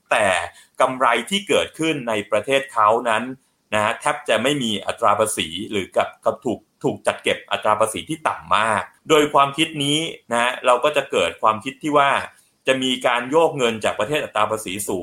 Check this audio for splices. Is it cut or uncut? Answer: uncut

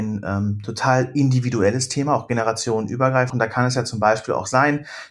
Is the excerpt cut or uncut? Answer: cut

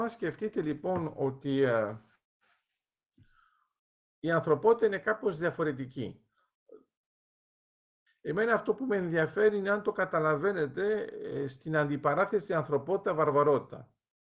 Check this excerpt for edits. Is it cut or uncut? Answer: cut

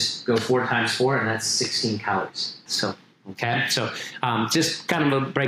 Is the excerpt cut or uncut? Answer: cut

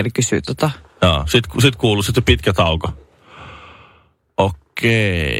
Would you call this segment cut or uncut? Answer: uncut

